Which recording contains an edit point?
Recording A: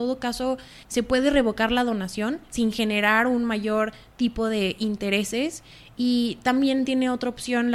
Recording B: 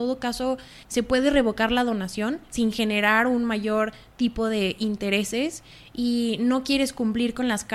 B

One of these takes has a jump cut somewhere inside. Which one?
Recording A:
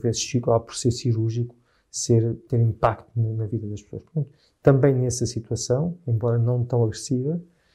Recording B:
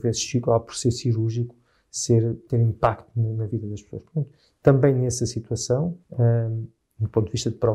B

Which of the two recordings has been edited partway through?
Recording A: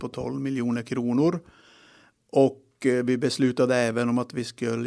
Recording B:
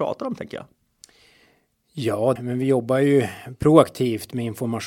B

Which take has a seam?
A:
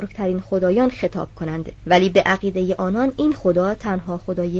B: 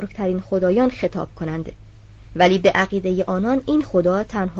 A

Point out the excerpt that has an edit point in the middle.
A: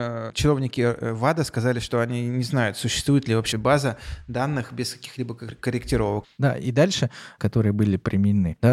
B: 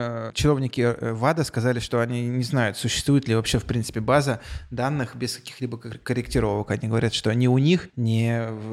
A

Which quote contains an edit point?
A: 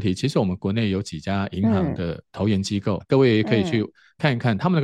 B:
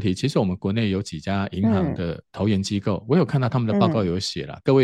A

